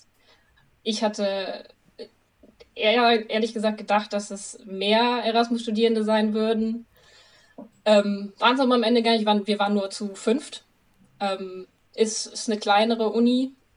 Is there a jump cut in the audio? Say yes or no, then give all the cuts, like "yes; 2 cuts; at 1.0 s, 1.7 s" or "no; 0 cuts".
no; 0 cuts